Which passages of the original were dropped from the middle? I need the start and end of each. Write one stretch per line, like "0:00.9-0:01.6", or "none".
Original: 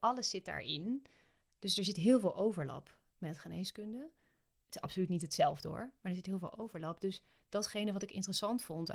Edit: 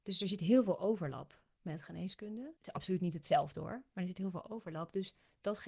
0:04.1-0:04.6